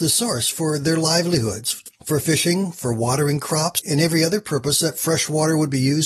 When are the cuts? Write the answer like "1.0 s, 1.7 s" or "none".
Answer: none